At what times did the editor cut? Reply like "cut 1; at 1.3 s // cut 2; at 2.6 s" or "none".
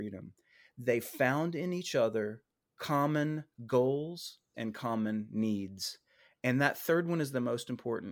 cut 1; at 4.5 s